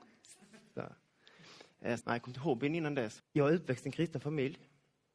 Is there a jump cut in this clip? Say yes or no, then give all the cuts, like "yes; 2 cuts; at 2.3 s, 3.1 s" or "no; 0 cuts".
yes; 2 cuts; at 2.0 s, 3.2 s